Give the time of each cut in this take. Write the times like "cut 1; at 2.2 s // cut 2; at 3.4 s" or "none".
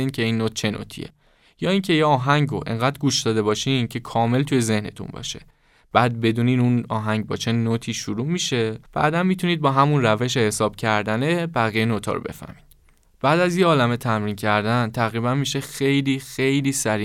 cut 1; at 8.9 s